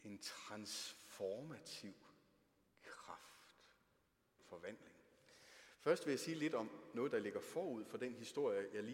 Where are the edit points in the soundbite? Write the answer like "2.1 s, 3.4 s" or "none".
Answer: 4.4 s